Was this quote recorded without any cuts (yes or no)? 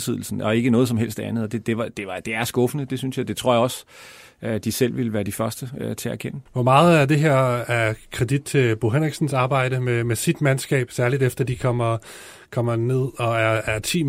no